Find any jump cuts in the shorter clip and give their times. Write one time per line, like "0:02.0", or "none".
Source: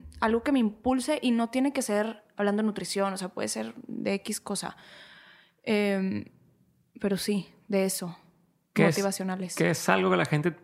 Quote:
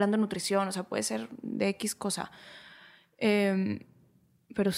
none